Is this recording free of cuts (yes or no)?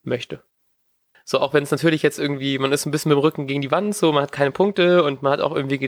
no